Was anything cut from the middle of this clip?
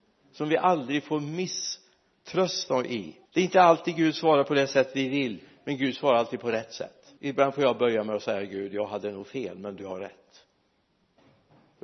yes; 2 cuts; at 3.3 s, 7.2 s

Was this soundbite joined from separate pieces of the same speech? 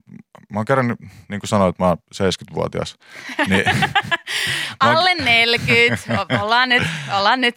no; 0 cuts

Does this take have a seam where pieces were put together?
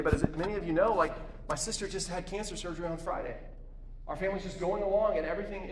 no; 0 cuts

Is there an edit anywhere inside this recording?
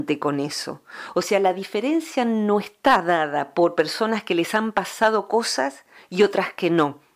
no; 0 cuts

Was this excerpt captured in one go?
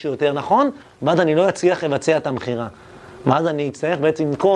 yes; 0 cuts

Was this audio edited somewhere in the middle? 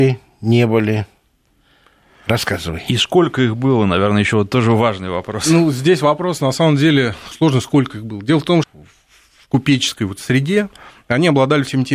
yes; 2 cuts; at 7.3 s, 8.6 s

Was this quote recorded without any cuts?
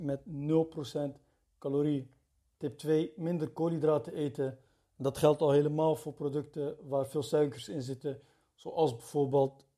yes; 0 cuts

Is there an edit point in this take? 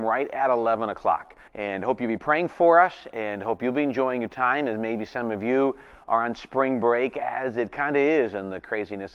yes; 1 cut; at 1.5 s

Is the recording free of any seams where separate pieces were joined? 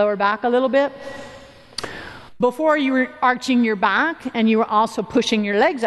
no; 1 cut; at 2.4 s

